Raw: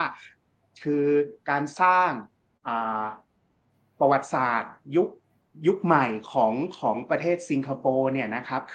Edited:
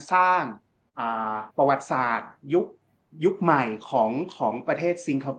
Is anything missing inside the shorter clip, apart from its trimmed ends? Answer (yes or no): yes